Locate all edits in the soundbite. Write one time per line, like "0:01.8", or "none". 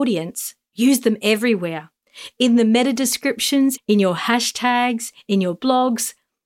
0:03.8